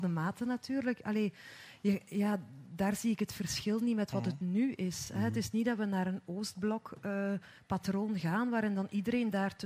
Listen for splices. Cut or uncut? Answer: uncut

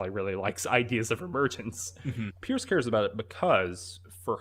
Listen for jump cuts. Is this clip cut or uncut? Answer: cut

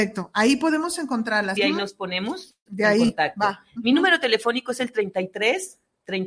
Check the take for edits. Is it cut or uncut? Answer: cut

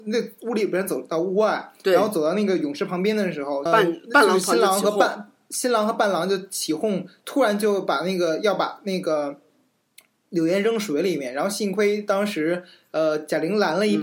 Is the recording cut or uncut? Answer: cut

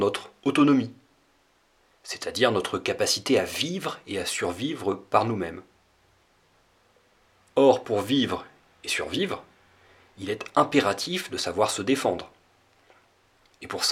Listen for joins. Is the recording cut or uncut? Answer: uncut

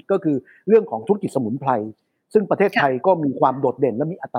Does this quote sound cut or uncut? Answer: uncut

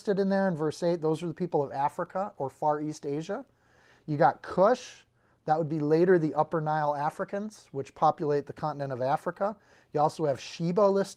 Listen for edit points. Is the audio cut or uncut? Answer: uncut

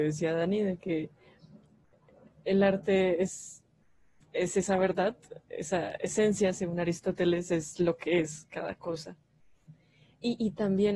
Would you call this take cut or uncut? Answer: uncut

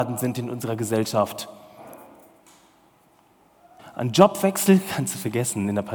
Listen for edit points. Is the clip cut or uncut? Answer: cut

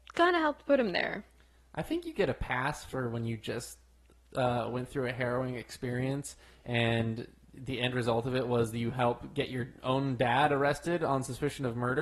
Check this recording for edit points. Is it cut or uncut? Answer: uncut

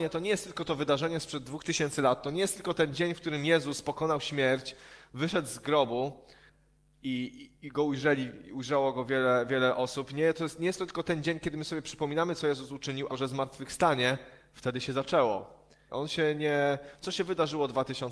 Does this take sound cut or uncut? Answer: cut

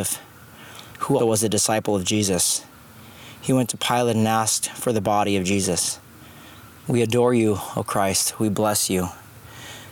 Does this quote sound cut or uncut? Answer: cut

